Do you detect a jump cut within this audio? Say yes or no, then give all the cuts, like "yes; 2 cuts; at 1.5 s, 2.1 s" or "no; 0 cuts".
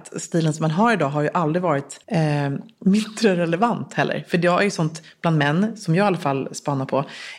yes; 1 cut; at 2.0 s